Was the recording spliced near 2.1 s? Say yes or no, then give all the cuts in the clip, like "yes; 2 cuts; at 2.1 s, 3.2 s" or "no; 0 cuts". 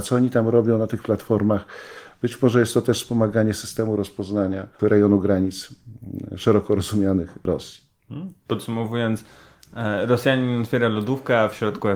yes; 1 cut; at 2.1 s